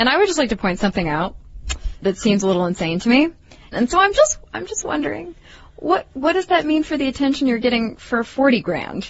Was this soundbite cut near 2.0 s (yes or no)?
yes